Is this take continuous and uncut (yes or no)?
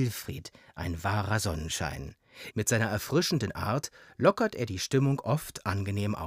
no